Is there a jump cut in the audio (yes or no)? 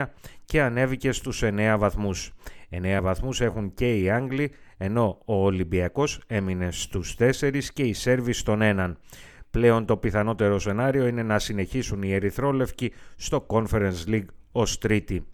no